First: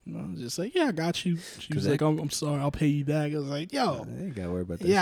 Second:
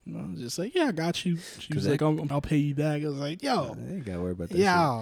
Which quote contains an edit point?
second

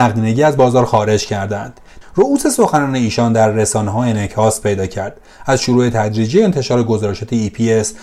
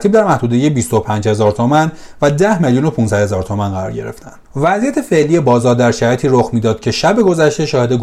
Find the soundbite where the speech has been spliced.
first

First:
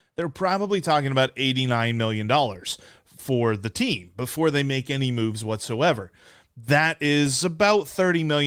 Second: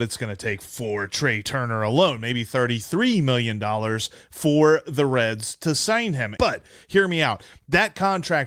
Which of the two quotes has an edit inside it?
second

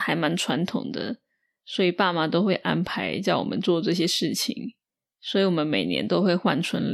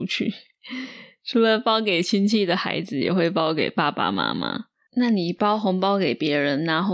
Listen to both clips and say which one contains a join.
second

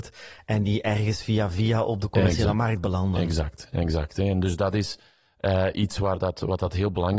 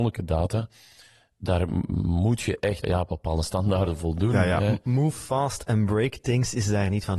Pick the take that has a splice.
second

